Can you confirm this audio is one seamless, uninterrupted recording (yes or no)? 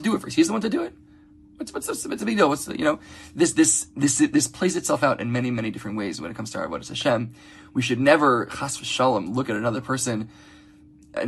yes